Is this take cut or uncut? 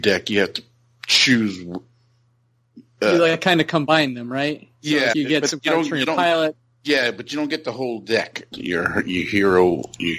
cut